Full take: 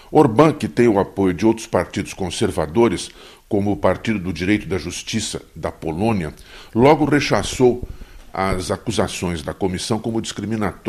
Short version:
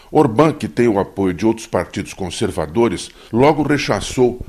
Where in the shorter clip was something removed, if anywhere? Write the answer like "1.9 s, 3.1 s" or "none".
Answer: 3.3 s